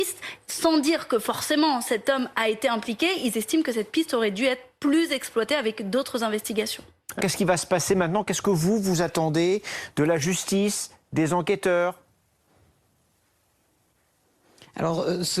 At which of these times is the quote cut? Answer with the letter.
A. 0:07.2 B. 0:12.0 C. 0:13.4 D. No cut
A